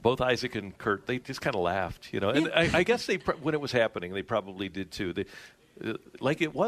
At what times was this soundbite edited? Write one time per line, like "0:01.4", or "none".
none